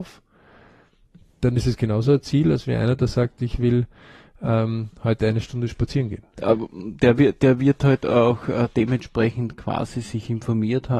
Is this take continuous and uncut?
no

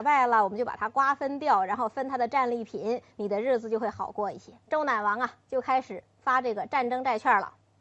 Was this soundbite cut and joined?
yes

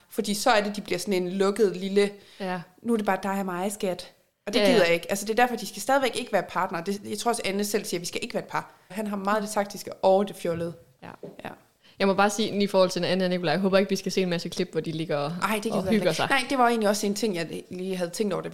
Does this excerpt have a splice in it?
yes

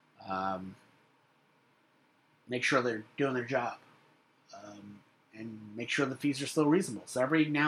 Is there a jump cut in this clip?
no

